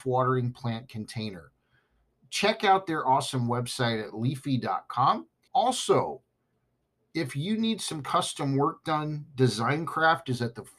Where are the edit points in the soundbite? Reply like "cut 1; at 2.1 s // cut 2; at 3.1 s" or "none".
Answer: cut 1; at 5.5 s